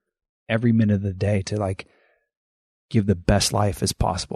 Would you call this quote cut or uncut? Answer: uncut